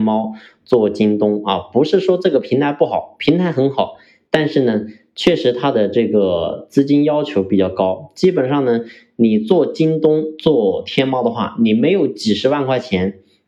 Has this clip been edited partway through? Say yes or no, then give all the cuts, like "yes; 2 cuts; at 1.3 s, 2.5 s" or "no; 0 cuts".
no; 0 cuts